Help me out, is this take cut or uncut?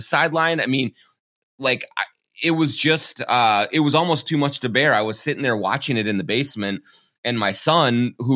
uncut